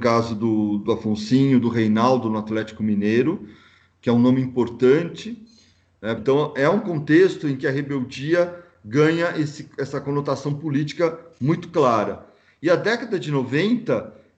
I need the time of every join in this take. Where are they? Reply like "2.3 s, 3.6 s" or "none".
6.2 s